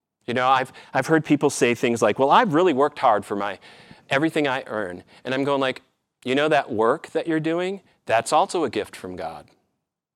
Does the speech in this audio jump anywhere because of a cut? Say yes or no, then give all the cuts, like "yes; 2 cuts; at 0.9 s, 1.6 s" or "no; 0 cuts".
no; 0 cuts